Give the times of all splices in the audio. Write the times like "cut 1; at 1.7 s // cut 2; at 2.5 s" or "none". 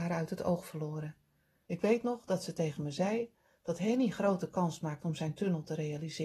cut 1; at 1.7 s

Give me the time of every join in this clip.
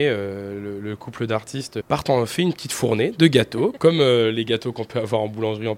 none

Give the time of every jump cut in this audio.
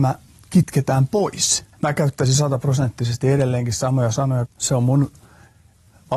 cut 1; at 1.7 s // cut 2; at 4.5 s

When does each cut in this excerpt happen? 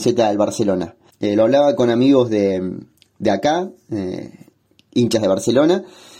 cut 1; at 1.1 s

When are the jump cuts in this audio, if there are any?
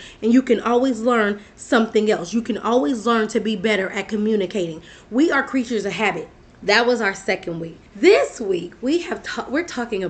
cut 1; at 6.5 s // cut 2; at 7.9 s

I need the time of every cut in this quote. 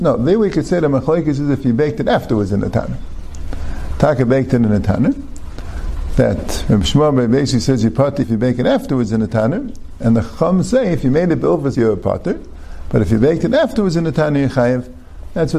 cut 1; at 8.2 s // cut 2; at 11.7 s

